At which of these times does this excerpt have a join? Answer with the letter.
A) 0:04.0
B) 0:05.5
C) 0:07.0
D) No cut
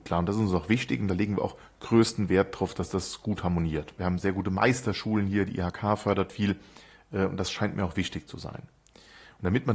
A